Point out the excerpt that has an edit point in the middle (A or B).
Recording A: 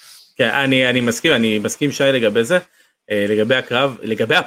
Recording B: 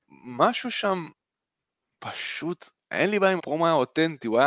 B